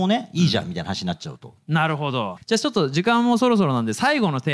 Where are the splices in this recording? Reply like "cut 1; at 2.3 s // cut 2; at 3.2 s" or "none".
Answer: cut 1; at 2.4 s

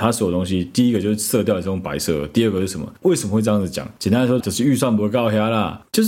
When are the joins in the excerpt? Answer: cut 1; at 3.0 s // cut 2; at 4.4 s

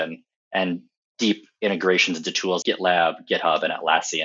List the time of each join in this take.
cut 1; at 2.6 s

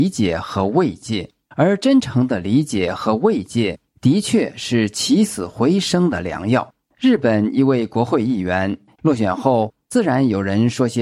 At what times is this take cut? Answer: cut 1; at 8.9 s

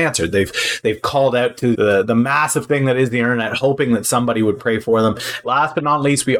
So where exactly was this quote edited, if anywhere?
cut 1; at 1.7 s // cut 2; at 5.4 s

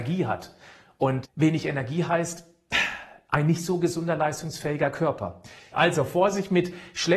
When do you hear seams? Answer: cut 1; at 1.2 s // cut 2; at 5.7 s

